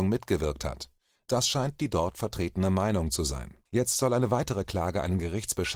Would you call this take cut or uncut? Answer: cut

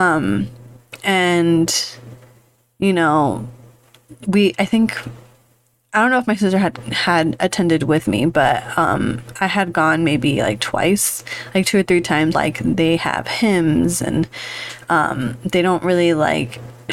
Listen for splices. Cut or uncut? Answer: cut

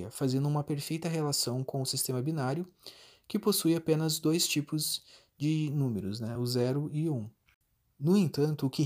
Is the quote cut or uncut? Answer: uncut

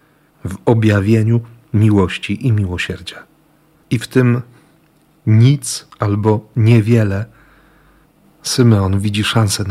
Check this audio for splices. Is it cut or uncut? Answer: cut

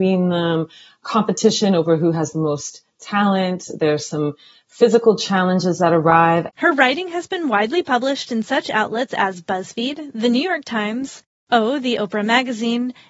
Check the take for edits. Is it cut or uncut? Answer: cut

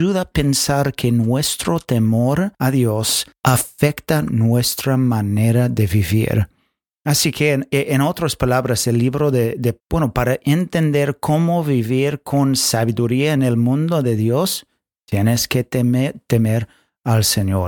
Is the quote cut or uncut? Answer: cut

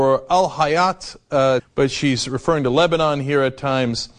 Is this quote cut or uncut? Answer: cut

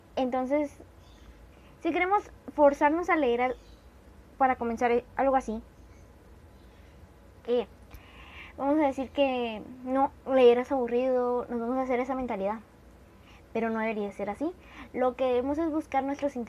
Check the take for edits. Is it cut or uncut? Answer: uncut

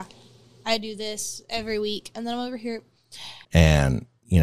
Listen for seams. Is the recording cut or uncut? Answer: cut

